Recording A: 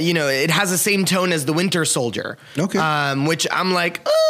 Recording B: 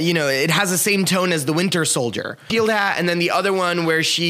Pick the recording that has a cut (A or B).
B